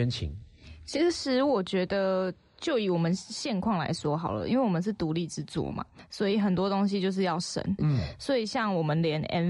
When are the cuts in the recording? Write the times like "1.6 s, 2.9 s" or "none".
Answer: 7.8 s